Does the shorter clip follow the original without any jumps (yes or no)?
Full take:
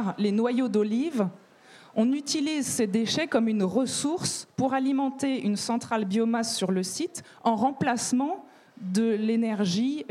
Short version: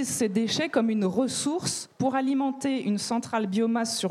yes